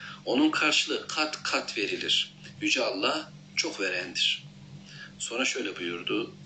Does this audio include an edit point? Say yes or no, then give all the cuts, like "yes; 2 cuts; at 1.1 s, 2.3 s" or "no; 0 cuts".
no; 0 cuts